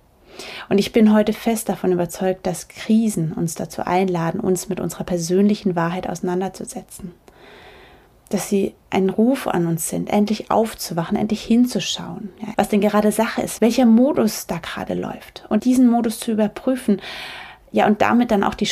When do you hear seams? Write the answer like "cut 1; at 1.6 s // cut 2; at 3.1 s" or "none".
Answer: cut 1; at 12.5 s // cut 2; at 13.6 s // cut 3; at 15.6 s